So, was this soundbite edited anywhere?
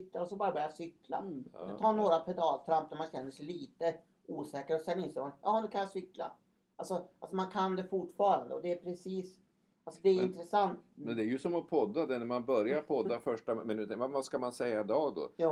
no; 0 cuts

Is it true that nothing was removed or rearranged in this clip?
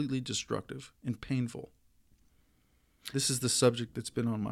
no; 2 cuts; at 0.9 s, 3.1 s

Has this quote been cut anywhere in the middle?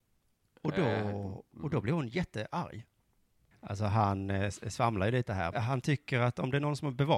yes; 2 cuts; at 3.5 s, 5.5 s

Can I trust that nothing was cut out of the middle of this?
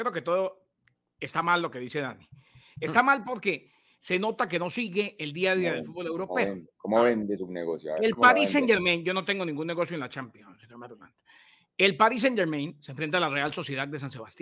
yes; 0 cuts

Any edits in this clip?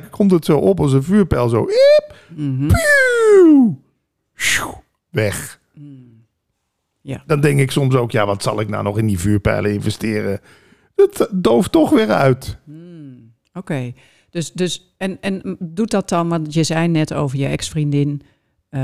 no; 0 cuts

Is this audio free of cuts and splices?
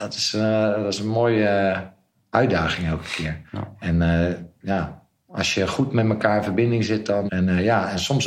no; 2 cuts; at 3.5 s, 7.3 s

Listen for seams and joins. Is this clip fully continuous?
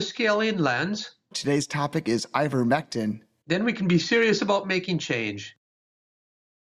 no; 2 cuts; at 1.3 s, 3.4 s

